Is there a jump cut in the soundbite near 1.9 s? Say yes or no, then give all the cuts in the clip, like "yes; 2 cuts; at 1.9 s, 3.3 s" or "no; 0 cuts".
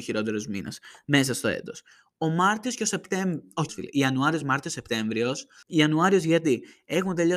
no; 2 cuts; at 3.7 s, 5.6 s